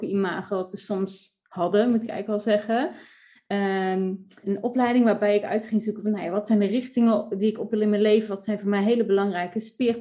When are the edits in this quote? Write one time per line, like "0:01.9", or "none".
0:04.4